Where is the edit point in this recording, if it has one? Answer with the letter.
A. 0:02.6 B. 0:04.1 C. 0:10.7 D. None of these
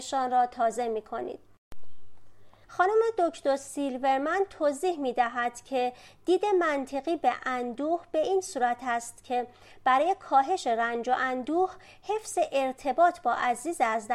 A